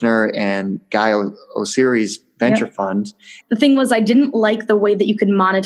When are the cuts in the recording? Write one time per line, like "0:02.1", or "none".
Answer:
0:03.4